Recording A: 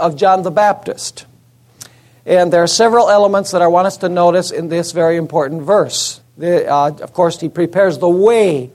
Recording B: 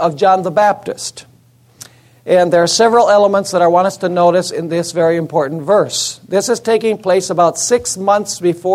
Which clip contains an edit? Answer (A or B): A